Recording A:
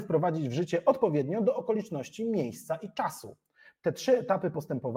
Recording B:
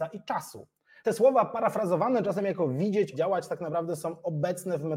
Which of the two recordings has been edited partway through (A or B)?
B